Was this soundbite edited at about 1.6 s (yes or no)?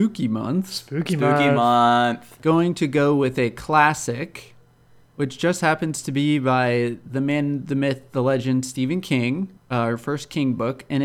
no